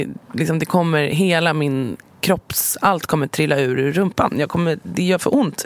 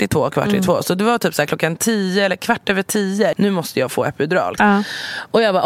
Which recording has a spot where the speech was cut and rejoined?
second; 2 cuts; at 3.3 s, 4.6 s

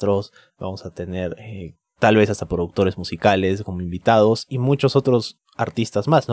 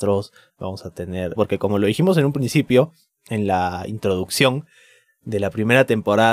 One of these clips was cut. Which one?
second; 1 cut; at 1.4 s

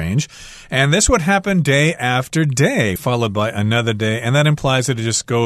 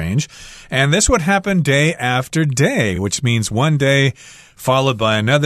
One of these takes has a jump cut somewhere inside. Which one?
first; 1 cut; at 3.0 s

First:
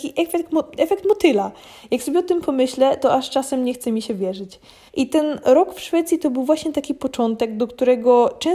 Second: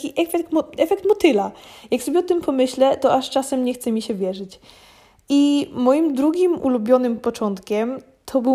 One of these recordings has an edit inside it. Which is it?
first; 1 cut; at 4.9 s

